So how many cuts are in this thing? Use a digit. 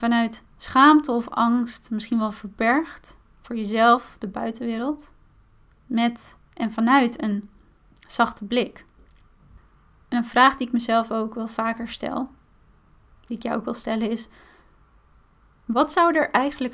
1